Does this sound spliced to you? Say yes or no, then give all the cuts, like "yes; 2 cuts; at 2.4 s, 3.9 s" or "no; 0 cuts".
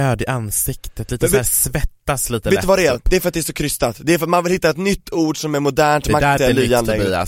yes; 1 cut; at 6.4 s